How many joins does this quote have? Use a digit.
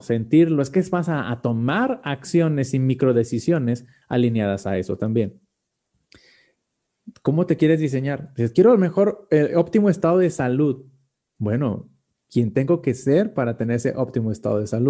0